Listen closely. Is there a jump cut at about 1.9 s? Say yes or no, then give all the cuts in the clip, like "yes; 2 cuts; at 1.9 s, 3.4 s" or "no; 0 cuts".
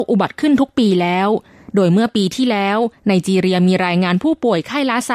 no; 0 cuts